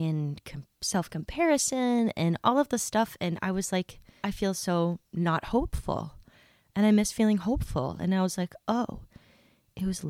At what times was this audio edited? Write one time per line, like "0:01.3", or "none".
0:04.2
0:08.0